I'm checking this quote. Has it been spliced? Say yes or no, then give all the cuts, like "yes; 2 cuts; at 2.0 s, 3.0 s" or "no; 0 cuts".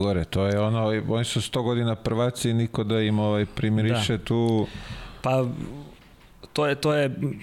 no; 0 cuts